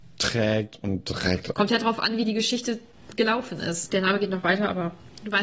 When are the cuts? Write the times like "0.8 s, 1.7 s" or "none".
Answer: 1.5 s, 3.9 s